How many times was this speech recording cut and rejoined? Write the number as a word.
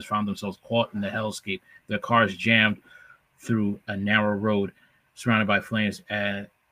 zero